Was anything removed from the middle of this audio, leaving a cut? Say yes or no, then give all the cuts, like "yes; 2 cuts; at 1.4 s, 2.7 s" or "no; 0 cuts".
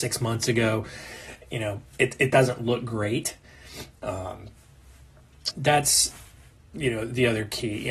yes; 1 cut; at 5.5 s